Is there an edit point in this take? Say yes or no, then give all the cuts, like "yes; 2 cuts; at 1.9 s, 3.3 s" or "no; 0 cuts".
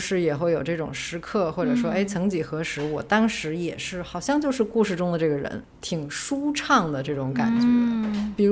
yes; 1 cut; at 5.6 s